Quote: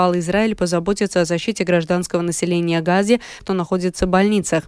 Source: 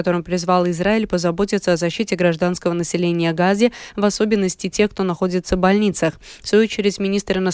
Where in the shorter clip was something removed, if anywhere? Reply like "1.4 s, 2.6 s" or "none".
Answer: 3.4 s